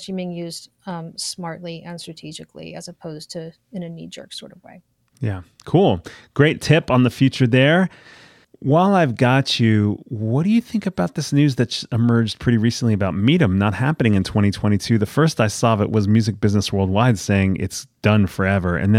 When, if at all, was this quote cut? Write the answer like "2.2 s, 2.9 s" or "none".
none